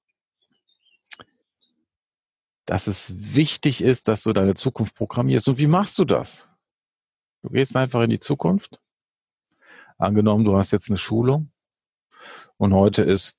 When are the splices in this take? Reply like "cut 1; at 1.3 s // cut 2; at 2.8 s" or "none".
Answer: none